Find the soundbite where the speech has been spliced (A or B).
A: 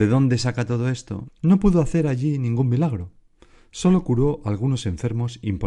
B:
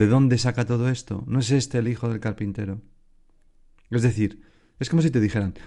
A